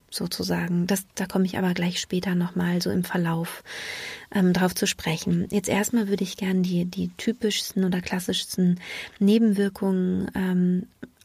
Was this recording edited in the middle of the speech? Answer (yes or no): no